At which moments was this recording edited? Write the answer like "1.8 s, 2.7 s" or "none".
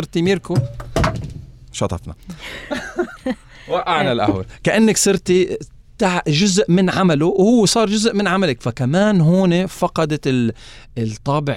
3.2 s